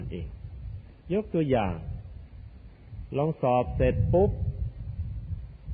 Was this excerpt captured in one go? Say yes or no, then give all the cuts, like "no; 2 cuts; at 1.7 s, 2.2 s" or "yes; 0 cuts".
no; 1 cut; at 1.0 s